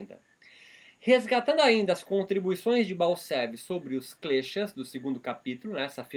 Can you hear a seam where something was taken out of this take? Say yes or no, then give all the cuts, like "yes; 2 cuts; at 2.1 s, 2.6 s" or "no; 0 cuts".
no; 0 cuts